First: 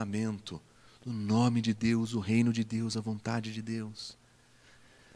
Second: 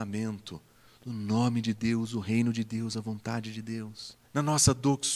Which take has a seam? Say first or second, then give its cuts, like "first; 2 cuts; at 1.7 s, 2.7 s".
second; 1 cut; at 4.2 s